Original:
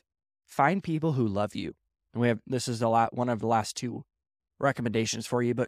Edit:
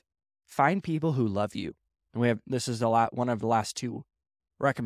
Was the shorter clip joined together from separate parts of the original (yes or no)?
no